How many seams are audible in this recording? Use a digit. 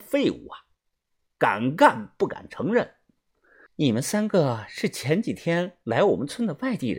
1